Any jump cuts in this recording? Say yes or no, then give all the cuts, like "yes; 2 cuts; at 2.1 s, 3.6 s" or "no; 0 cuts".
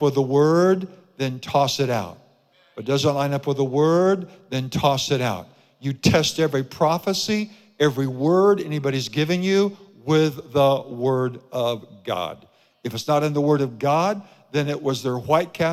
no; 0 cuts